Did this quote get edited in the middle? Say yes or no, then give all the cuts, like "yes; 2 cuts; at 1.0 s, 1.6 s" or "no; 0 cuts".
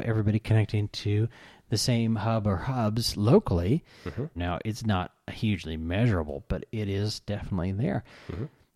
yes; 1 cut; at 4.4 s